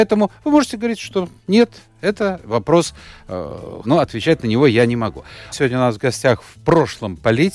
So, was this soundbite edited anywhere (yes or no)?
yes